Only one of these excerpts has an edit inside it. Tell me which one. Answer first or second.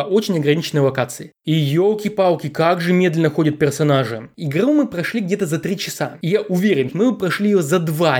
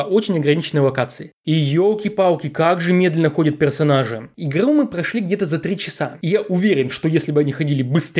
first